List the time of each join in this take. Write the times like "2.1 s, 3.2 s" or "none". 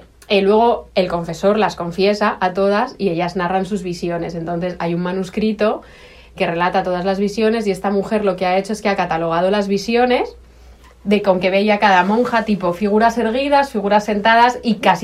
6.4 s